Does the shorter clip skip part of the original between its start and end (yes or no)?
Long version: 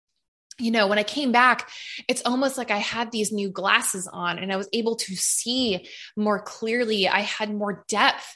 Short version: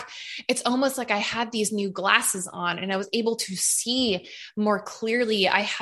no